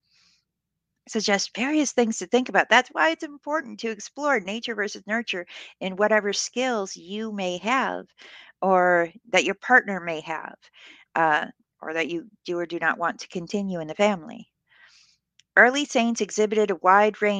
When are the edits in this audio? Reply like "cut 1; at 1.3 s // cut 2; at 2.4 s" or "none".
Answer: none